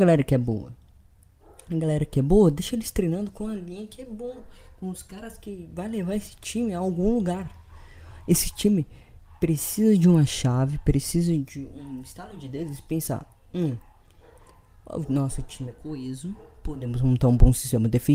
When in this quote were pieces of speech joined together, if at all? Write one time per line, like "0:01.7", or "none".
none

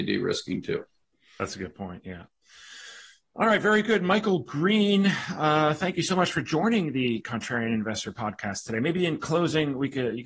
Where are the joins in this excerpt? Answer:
none

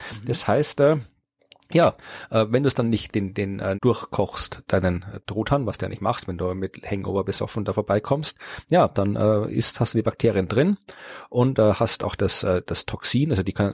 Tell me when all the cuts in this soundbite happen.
0:03.7

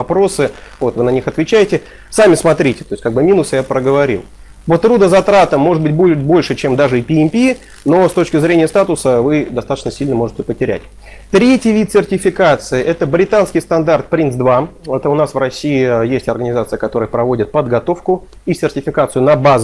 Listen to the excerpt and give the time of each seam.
none

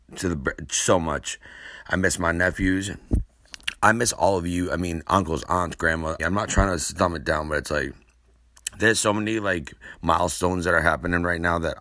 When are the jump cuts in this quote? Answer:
0:06.2

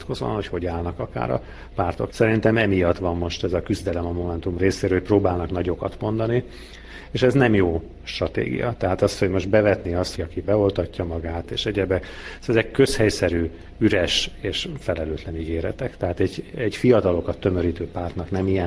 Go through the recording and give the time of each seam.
0:02.1
0:10.1
0:11.4

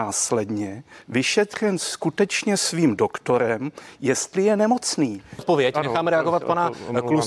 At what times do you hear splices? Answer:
0:05.4

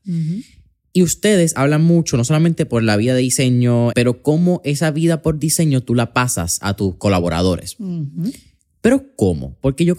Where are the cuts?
0:03.9

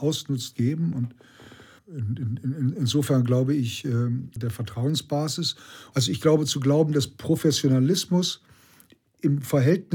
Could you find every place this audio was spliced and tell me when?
0:01.8
0:04.4
0:05.9

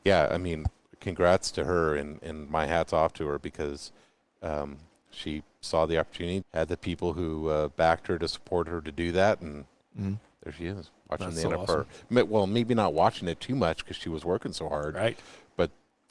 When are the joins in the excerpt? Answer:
0:06.4

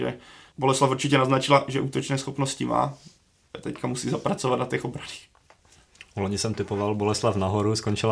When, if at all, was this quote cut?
none

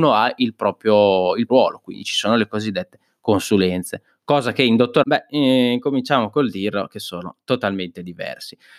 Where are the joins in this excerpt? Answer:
0:01.5
0:05.0

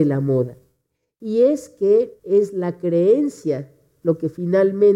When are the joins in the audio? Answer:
none

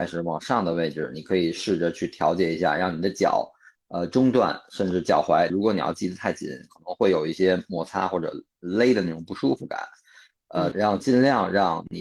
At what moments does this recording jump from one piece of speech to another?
0:05.5
0:10.7

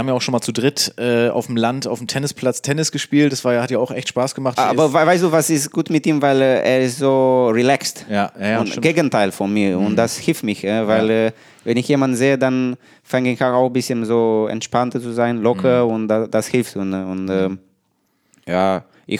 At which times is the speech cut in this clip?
0:04.6

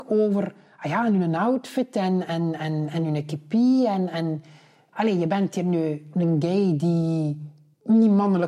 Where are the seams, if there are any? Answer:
none

